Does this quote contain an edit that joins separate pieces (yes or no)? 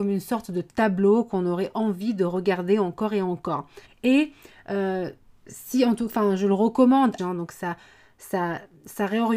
yes